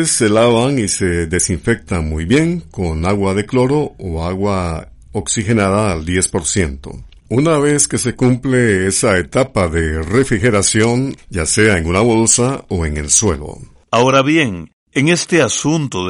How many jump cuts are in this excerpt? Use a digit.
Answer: 2